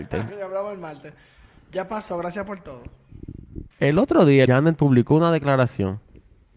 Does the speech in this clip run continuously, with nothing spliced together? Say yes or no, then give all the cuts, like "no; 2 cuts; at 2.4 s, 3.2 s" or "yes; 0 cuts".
no; 1 cut; at 4.5 s